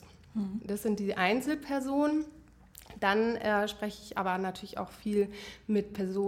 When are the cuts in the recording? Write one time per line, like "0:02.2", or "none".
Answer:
none